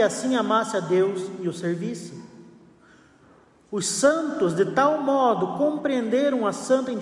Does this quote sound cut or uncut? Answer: uncut